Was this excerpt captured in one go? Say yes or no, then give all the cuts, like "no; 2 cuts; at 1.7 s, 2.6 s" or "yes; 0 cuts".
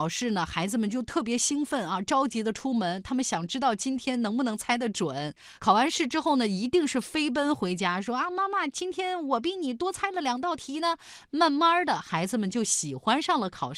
yes; 0 cuts